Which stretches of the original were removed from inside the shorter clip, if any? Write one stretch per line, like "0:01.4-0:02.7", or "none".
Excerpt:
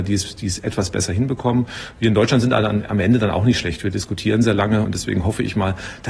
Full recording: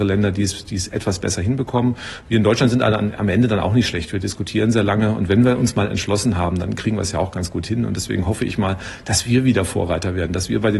0:05.1-0:07.9